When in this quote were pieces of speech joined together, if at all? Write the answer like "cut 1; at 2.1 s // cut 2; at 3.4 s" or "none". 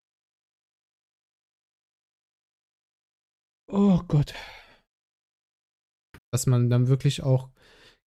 cut 1; at 6.2 s